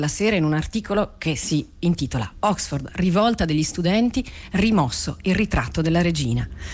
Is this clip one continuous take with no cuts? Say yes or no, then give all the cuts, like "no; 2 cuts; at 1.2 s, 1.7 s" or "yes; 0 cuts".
yes; 0 cuts